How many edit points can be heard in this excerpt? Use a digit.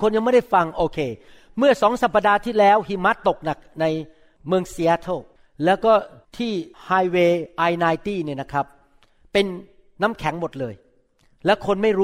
0